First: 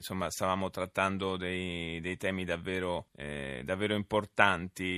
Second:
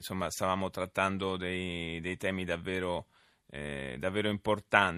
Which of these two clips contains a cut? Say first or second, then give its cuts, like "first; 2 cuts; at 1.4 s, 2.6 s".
first; 1 cut; at 3.1 s